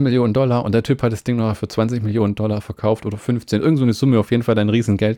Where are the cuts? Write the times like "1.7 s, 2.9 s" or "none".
none